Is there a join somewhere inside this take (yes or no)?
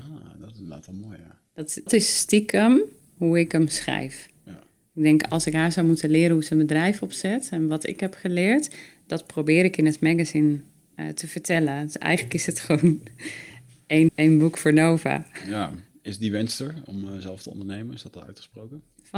yes